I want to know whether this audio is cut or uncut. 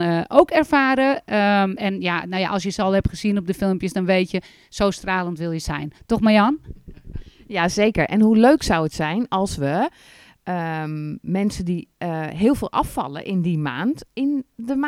uncut